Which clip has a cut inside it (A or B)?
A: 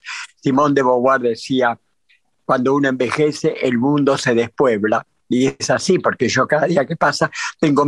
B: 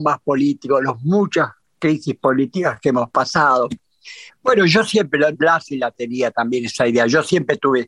B